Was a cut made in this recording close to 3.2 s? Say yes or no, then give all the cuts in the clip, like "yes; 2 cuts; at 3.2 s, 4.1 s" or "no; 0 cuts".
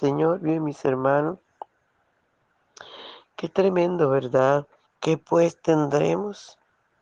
no; 1 cut; at 4.9 s